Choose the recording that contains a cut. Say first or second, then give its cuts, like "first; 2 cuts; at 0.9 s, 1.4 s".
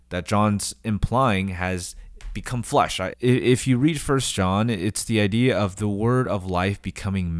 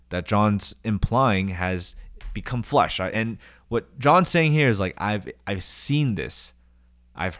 first; 1 cut; at 3.1 s